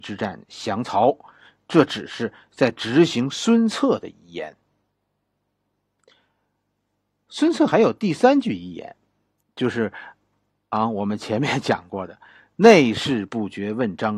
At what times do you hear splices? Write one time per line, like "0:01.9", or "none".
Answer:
none